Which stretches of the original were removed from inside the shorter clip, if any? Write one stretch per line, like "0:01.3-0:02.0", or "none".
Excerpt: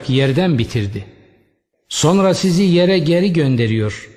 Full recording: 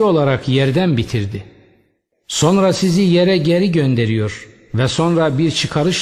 none